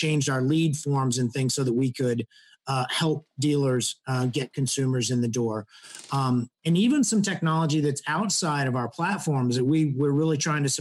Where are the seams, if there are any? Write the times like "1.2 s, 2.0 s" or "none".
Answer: none